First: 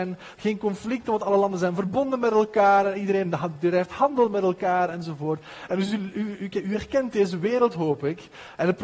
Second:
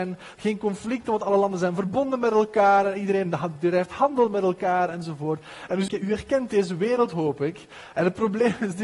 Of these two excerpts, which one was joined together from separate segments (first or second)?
second